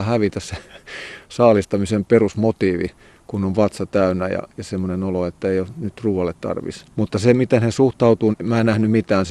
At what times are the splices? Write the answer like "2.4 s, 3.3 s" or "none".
6.9 s, 8.3 s